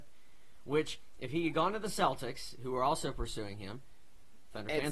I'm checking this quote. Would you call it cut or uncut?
uncut